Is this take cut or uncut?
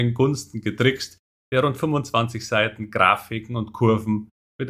cut